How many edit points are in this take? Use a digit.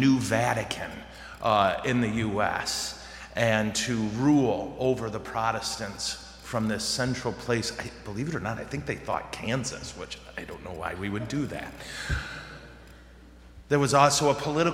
0